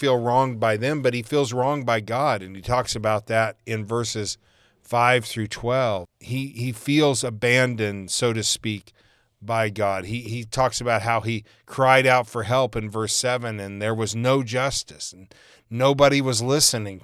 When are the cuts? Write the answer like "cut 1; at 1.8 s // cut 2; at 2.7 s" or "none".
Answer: cut 1; at 6.1 s